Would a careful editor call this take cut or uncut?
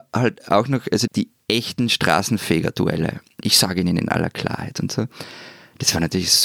cut